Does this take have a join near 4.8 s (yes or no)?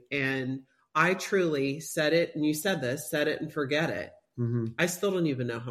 no